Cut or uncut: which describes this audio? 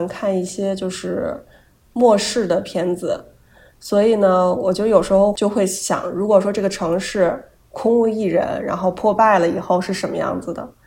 uncut